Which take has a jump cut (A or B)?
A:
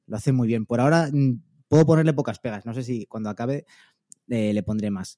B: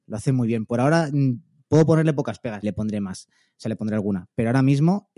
B